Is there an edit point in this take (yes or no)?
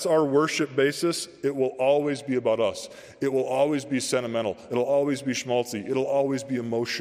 no